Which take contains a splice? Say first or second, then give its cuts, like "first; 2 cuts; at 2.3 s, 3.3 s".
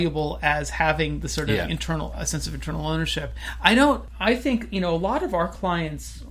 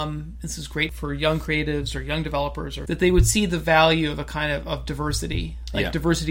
second; 1 cut; at 2.9 s